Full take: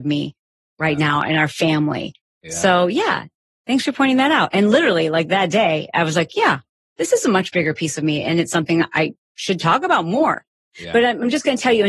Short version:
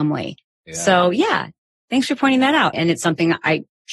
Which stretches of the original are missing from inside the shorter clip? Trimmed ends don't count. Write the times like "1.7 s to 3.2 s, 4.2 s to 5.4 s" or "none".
4.5 s to 8.2 s

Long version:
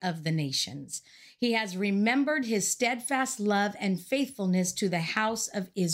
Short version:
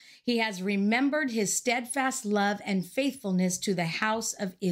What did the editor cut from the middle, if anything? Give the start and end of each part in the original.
none

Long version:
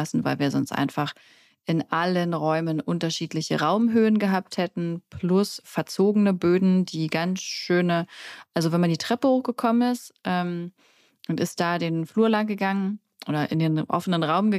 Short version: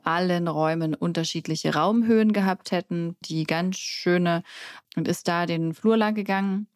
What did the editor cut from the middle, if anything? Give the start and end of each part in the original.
5.1 s to 6.9 s, 8.5 s to 11.2 s

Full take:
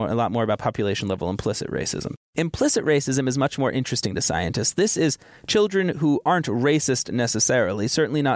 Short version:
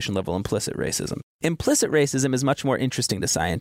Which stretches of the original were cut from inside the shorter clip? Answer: none

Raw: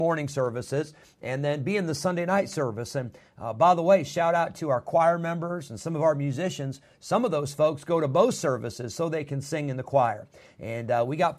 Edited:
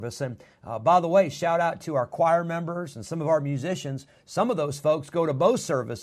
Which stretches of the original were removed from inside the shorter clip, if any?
none

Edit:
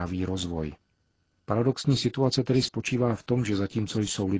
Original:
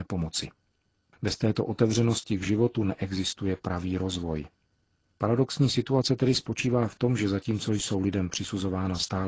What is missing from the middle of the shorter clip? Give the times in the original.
none

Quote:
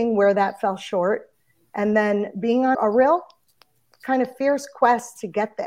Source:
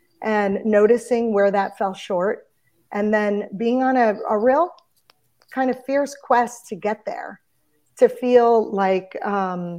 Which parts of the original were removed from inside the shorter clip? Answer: 3.9 s to 4.2 s

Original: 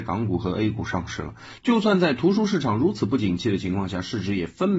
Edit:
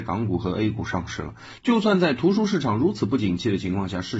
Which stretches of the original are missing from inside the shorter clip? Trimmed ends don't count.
none

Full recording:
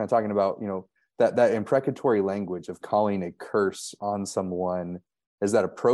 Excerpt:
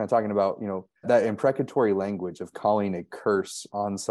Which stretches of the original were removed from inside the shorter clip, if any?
1.0 s to 1.3 s

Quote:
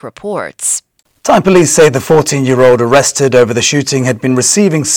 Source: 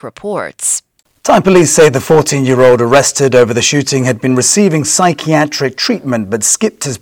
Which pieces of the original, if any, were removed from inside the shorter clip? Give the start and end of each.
none

